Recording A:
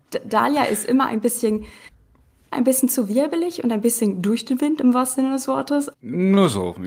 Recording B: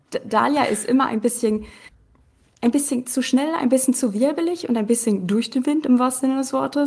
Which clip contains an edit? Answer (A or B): A